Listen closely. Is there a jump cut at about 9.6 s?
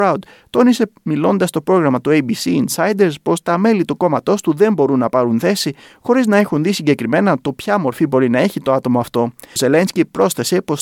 yes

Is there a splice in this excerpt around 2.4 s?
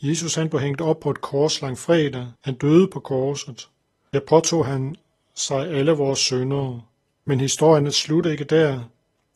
yes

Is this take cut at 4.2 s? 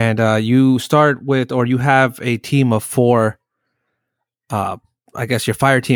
no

